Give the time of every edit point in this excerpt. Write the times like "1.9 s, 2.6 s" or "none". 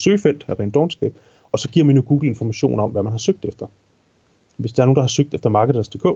none